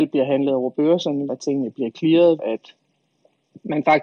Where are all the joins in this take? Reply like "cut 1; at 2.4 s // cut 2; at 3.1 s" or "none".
cut 1; at 1.3 s // cut 2; at 2.4 s